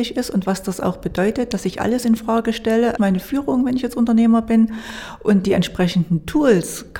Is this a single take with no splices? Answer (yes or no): no